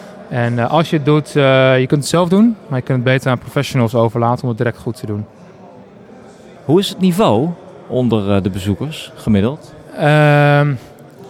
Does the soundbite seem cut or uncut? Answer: uncut